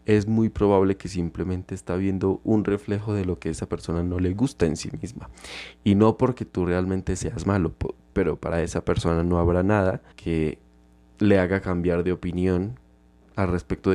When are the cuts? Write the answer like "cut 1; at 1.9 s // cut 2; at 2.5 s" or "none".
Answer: cut 1; at 8.1 s // cut 2; at 10.1 s